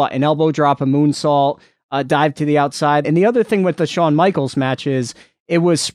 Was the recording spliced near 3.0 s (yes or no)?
yes